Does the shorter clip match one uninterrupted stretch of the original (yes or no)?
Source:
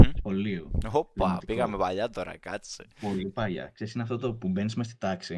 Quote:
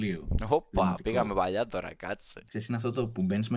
no